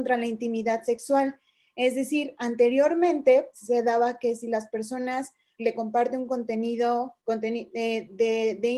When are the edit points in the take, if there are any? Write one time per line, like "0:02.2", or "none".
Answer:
0:03.5
0:05.6
0:07.2